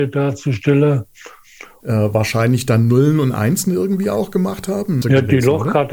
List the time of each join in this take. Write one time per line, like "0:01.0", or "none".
0:01.8
0:05.0